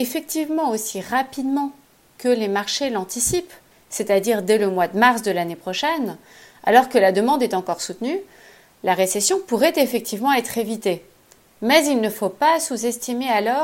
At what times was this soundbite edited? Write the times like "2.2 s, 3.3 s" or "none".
3.7 s